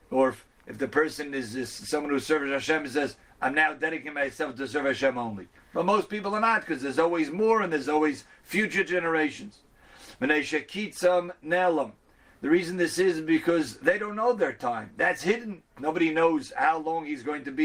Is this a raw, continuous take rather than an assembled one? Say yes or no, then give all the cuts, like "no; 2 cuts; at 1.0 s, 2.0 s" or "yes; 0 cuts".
yes; 0 cuts